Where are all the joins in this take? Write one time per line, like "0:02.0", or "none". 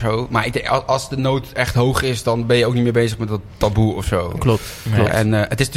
none